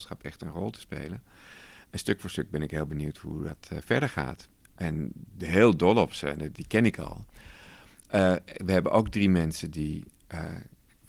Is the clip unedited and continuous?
yes; 0 cuts

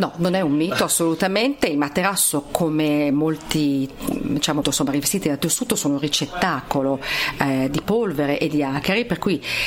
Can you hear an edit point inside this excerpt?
yes; 1 cut; at 4.6 s

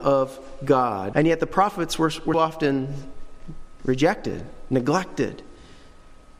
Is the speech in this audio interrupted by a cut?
yes; 2 cuts; at 1.1 s, 2.3 s

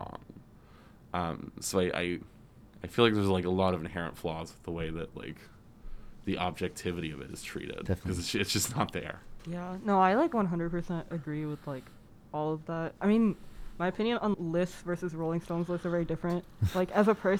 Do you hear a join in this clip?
yes; 2 cuts; at 9.4 s, 14.3 s

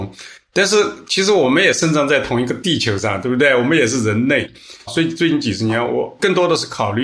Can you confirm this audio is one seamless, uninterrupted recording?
yes; 0 cuts

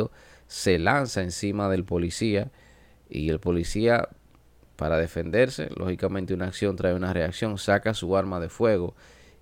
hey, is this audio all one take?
yes; 0 cuts

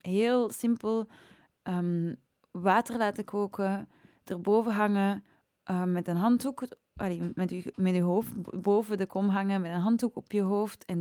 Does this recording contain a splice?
no; 0 cuts

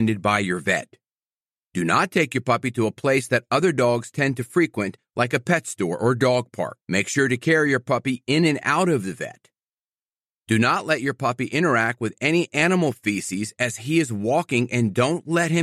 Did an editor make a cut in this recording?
yes; 1 cut; at 6.8 s

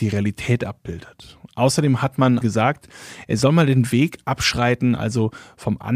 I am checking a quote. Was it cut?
yes; 1 cut; at 2.4 s

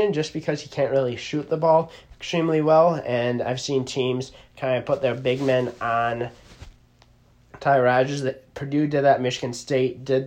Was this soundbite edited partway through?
no; 0 cuts

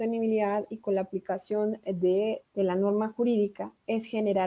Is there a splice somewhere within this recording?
yes; 1 cut; at 2.4 s

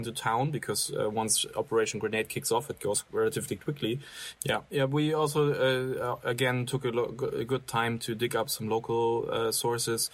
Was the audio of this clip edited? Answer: yes; 1 cut; at 4.4 s

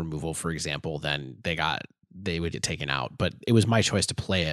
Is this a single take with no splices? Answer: no; 1 cut; at 2.5 s

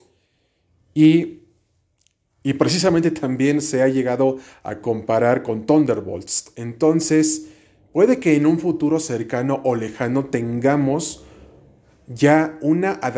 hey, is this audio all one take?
yes; 0 cuts

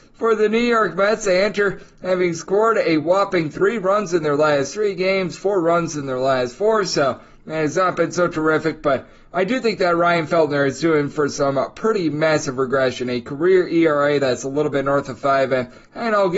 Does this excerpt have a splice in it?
no; 0 cuts

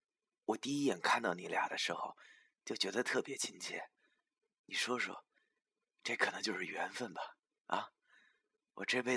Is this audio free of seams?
yes; 0 cuts

